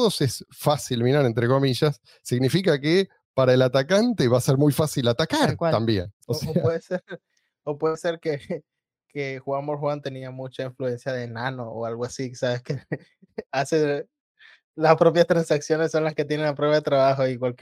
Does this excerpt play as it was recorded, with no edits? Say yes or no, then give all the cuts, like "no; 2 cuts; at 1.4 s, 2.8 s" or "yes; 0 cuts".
yes; 0 cuts